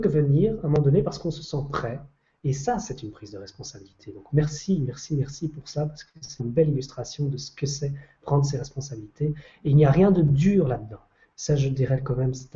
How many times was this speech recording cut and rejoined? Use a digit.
1